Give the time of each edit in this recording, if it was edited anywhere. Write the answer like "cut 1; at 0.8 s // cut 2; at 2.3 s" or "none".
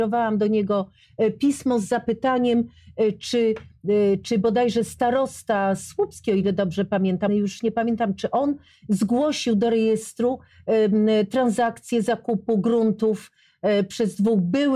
cut 1; at 7.3 s